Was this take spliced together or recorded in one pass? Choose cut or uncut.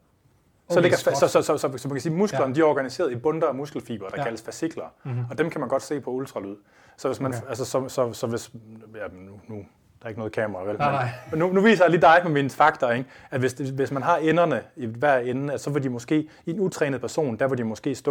uncut